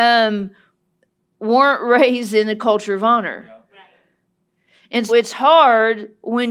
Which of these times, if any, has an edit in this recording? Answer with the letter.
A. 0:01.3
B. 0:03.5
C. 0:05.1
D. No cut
C